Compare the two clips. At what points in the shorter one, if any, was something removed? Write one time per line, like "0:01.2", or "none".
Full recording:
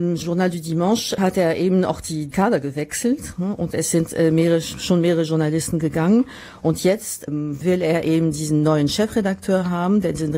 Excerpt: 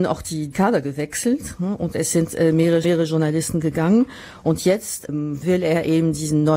0:02.8